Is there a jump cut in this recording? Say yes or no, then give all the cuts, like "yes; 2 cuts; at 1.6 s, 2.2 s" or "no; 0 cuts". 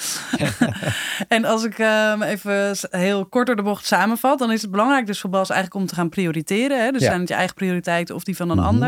no; 0 cuts